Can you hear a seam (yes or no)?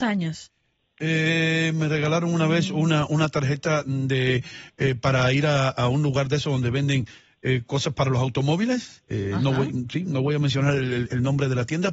no